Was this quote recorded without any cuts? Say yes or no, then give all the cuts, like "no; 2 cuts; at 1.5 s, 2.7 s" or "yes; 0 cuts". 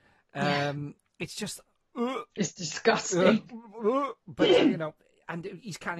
yes; 0 cuts